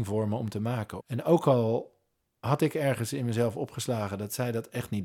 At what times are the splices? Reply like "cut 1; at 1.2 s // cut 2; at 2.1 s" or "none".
cut 1; at 1.0 s